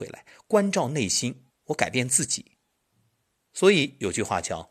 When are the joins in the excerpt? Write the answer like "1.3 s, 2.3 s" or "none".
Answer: 1.5 s